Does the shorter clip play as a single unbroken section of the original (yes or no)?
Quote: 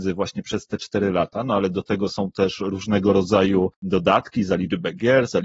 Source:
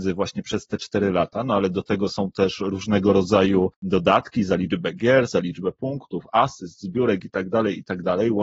yes